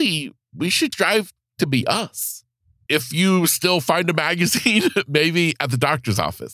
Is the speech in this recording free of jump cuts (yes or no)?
no